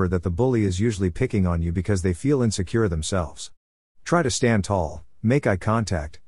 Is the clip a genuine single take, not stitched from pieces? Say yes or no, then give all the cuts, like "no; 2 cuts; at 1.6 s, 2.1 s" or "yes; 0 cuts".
yes; 0 cuts